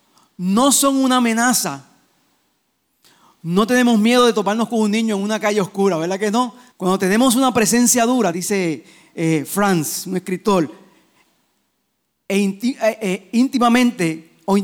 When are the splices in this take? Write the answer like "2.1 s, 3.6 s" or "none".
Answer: 6.7 s, 8.3 s